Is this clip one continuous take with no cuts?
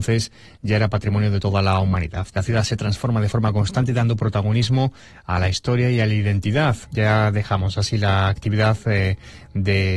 no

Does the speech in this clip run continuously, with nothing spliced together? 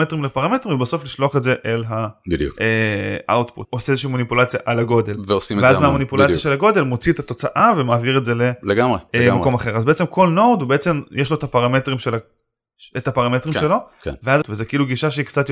no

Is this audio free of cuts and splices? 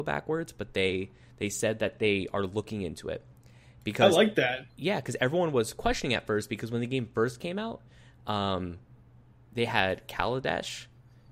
yes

